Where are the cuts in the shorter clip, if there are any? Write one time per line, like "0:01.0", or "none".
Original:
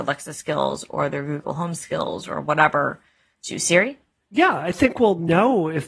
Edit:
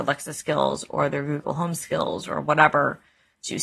none

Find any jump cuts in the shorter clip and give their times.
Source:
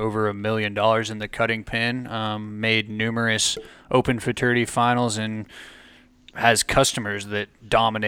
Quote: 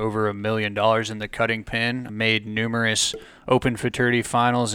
0:02.1

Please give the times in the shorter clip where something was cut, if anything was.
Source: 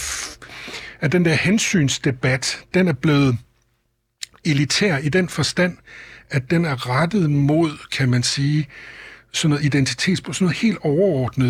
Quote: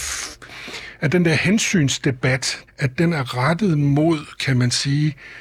0:02.7

